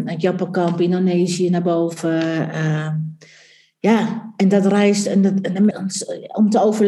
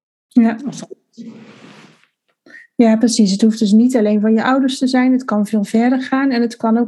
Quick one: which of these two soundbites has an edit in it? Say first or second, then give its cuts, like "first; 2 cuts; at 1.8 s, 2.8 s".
first; 1 cut; at 5.7 s